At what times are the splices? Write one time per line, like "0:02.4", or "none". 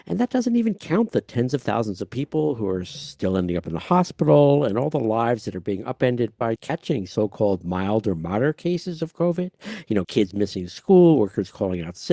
0:06.6
0:10.0